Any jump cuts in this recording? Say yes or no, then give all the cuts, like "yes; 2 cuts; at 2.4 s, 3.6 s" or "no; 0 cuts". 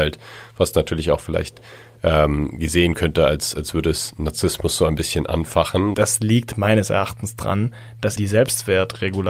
yes; 2 cuts; at 5.9 s, 8.2 s